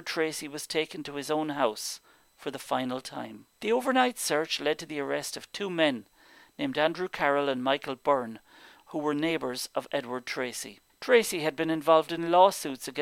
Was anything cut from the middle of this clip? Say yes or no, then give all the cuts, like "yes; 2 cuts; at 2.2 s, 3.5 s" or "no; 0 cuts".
yes; 1 cut; at 10.9 s